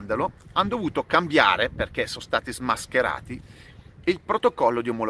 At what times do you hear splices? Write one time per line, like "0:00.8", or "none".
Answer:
none